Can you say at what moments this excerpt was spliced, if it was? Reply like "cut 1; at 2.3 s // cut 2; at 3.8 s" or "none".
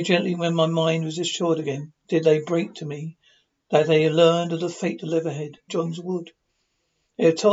cut 1; at 5.7 s

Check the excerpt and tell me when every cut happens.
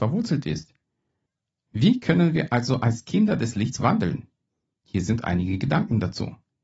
none

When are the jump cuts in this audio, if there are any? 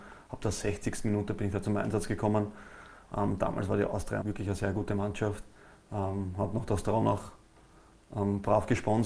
cut 1; at 4.2 s

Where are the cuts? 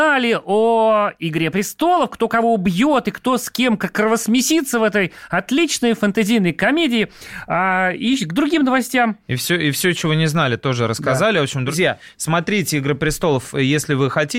none

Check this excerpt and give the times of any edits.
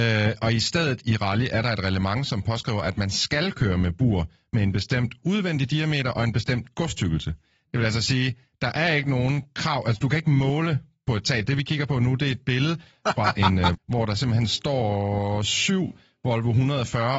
cut 1; at 11.5 s // cut 2; at 13.7 s

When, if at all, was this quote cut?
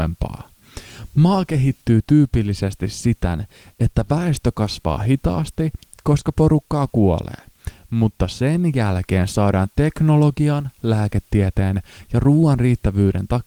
none

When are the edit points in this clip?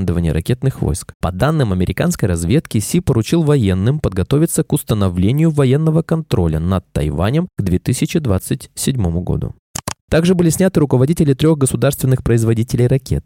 cut 1; at 1.1 s // cut 2; at 10.0 s

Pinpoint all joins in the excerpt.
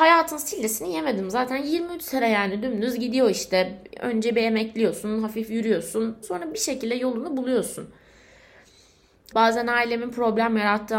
cut 1; at 6.2 s // cut 2; at 9.3 s

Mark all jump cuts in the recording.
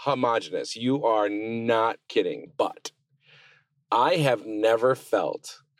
cut 1; at 2.5 s

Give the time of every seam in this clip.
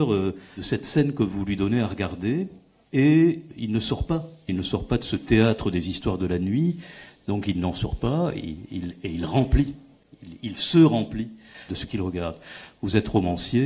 cut 1; at 4.5 s

